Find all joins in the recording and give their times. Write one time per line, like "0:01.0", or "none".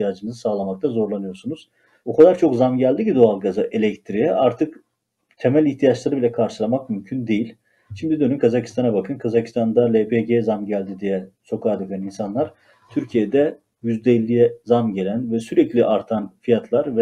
0:02.0